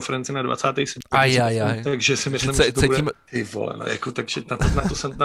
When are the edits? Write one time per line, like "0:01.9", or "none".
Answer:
0:01.0
0:03.1

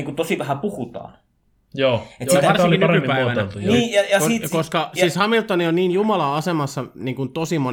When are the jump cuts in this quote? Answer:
none

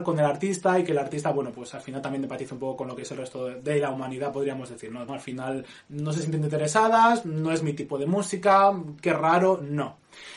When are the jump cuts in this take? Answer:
0:05.1

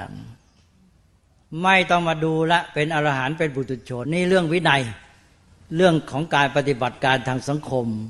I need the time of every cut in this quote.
0:04.0

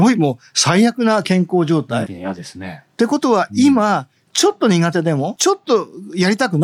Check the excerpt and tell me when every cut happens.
0:02.1
0:05.4

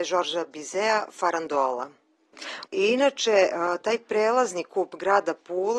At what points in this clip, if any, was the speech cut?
0:02.7

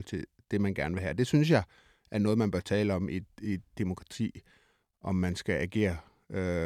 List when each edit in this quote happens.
none

